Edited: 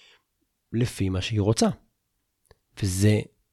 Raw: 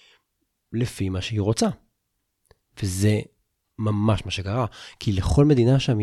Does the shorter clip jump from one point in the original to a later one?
no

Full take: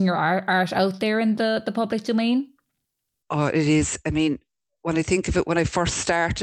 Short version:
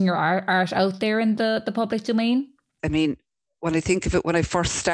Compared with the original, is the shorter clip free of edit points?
no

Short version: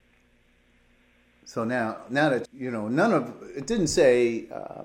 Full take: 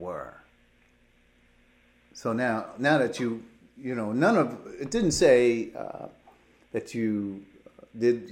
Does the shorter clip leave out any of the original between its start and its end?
yes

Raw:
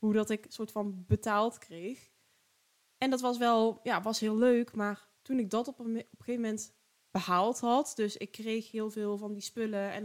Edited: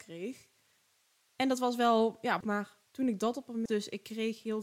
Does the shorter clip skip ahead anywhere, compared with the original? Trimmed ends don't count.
yes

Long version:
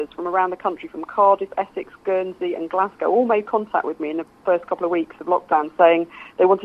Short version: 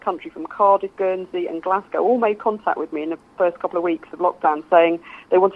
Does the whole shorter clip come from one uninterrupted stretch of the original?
no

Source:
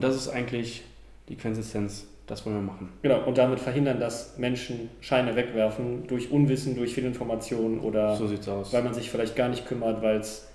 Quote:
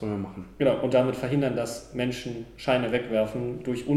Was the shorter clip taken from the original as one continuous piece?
yes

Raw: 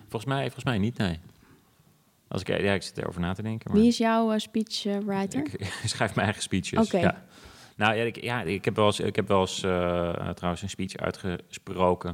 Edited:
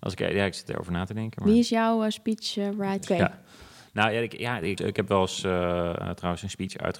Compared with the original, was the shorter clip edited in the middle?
yes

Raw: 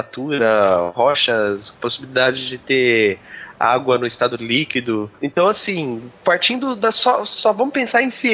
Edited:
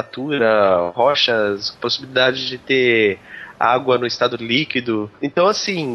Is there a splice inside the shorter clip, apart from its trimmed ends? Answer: no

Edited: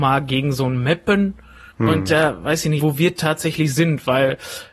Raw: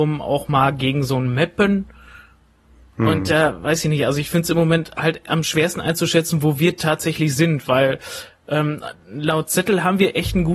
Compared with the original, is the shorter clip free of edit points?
no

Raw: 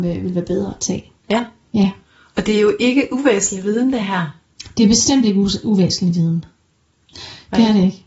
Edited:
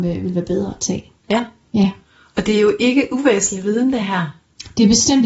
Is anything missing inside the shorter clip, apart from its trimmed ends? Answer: no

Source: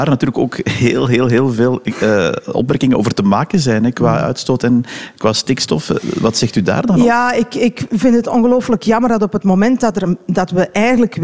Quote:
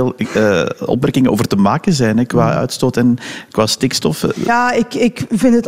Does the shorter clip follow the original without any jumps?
no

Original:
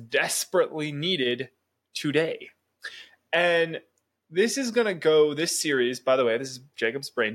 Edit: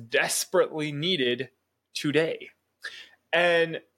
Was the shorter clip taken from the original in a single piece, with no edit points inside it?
yes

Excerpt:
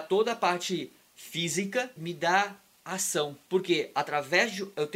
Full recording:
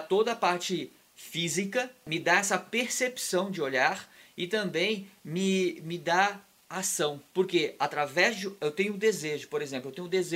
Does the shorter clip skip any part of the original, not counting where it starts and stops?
yes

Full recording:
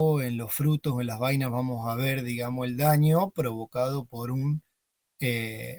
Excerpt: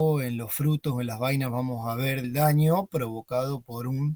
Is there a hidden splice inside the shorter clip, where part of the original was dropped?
yes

